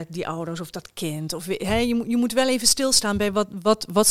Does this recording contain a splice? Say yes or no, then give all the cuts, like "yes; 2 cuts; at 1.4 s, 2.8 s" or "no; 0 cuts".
no; 0 cuts